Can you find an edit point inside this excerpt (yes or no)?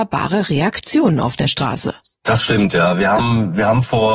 yes